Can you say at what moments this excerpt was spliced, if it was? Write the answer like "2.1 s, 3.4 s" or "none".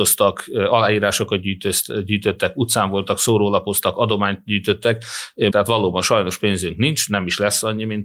5.5 s